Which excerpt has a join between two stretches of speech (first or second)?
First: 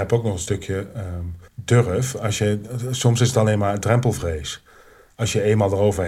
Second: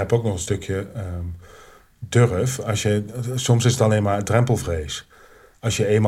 first